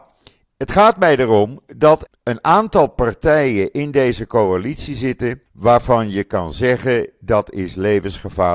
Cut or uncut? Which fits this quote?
cut